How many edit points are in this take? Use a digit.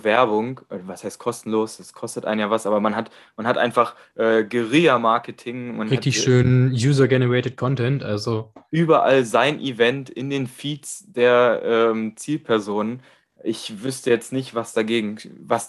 0